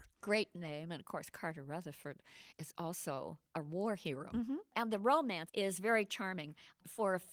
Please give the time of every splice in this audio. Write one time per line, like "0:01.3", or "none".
0:04.3
0:05.5

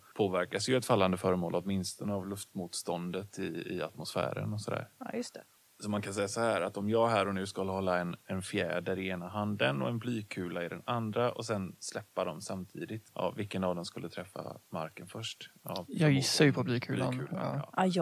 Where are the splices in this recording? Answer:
none

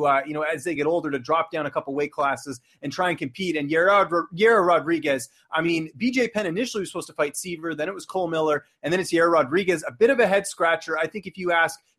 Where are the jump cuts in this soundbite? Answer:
none

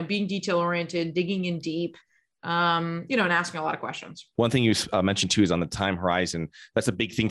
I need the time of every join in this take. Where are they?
0:04.3

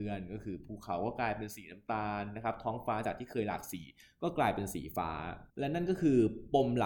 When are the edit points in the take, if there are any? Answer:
0:05.5

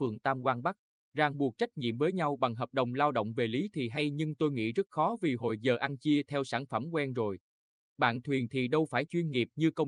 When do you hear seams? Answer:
0:01.0

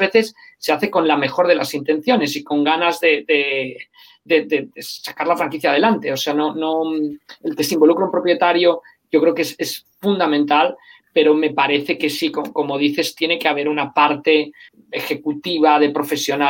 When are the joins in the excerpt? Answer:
none

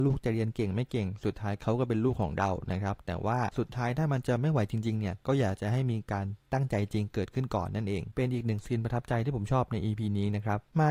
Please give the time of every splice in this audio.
none

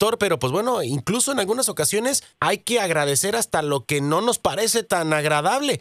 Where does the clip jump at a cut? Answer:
0:02.3

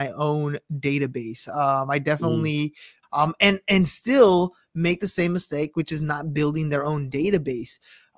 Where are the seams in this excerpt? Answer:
0:03.0

